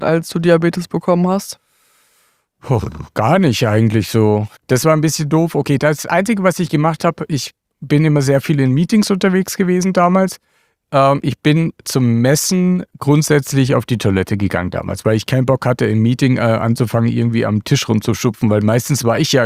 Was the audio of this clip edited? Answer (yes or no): yes